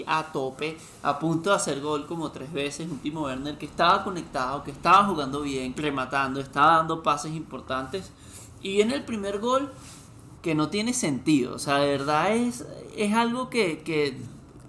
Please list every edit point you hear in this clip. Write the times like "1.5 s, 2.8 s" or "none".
5.7 s, 10.3 s